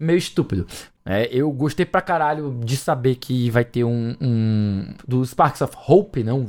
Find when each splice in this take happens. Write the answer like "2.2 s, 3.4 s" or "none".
0.9 s, 5.0 s

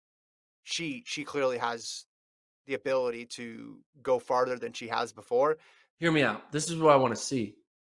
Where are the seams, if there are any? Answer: 5.9 s

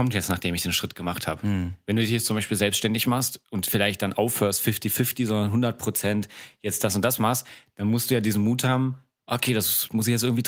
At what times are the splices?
none

